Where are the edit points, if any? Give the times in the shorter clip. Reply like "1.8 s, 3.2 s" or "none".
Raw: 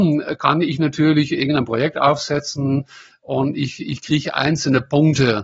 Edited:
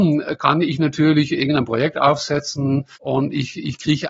3.0 s